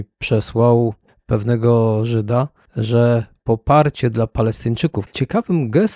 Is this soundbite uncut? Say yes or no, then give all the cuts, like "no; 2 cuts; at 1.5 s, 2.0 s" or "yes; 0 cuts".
no; 1 cut; at 5.1 s